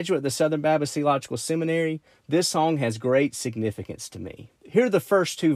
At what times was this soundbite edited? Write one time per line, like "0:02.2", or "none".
0:04.6